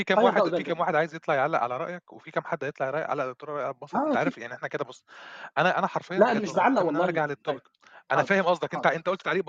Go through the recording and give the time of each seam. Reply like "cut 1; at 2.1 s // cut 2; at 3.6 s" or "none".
none